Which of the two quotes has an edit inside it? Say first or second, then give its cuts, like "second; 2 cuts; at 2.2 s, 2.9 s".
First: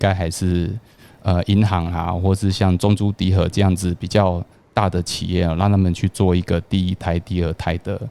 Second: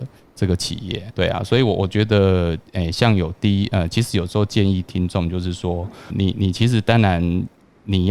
second; 2 cuts; at 1.1 s, 6.1 s